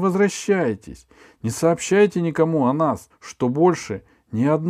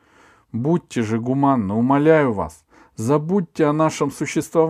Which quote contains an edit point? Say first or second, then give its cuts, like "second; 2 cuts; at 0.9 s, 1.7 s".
first; 1 cut; at 3.1 s